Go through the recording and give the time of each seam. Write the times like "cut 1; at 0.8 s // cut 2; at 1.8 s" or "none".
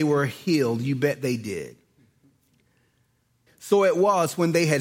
cut 1; at 3.5 s